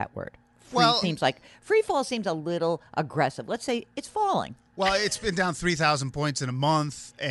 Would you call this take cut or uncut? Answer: cut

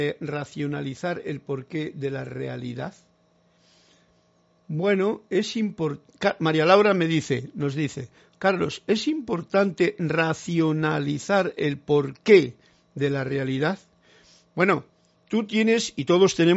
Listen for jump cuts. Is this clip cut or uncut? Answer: uncut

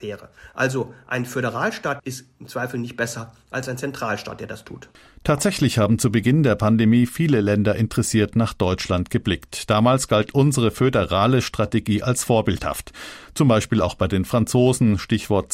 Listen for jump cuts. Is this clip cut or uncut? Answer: cut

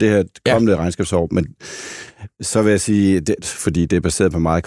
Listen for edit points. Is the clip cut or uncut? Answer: cut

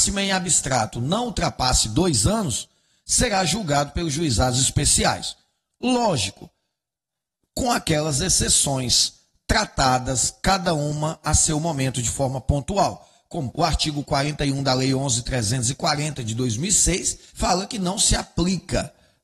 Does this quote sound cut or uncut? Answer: cut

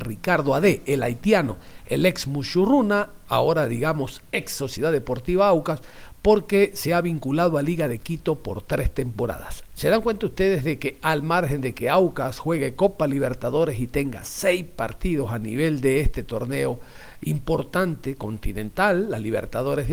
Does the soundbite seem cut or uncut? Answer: cut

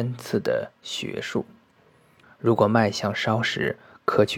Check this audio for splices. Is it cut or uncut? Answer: cut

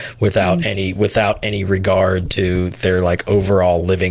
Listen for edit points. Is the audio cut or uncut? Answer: uncut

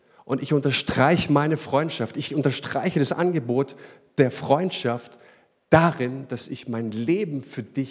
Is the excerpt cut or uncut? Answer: uncut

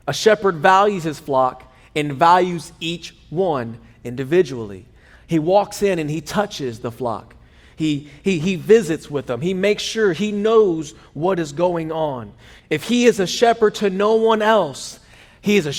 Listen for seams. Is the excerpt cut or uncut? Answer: cut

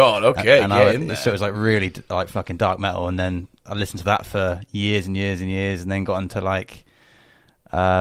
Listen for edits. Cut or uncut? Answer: uncut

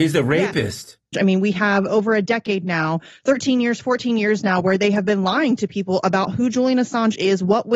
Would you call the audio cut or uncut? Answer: cut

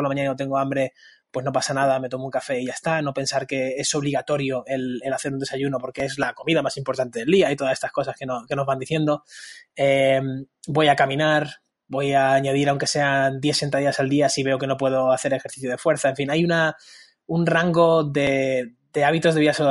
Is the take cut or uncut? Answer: uncut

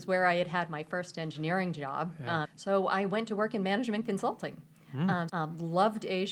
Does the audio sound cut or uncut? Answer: cut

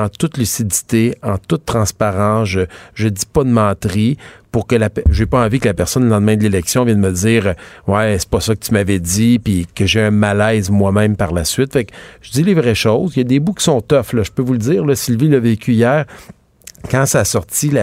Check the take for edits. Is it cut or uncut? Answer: uncut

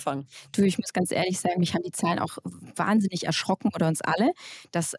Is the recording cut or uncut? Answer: uncut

